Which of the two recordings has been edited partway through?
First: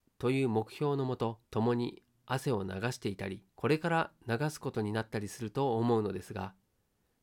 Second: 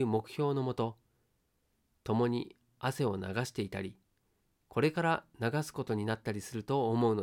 first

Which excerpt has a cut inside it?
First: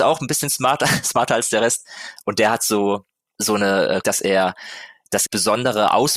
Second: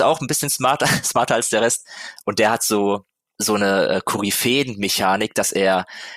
first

